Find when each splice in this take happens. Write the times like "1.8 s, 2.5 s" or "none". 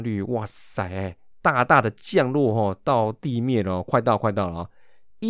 none